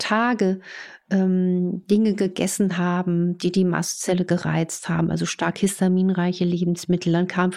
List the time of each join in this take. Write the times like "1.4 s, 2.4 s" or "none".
none